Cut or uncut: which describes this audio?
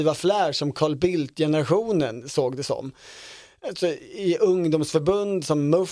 uncut